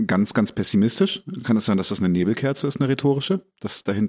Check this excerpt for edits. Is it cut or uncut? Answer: uncut